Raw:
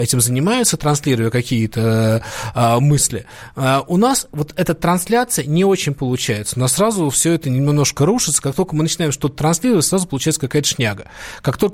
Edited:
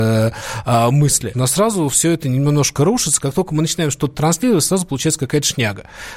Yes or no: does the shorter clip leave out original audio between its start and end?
yes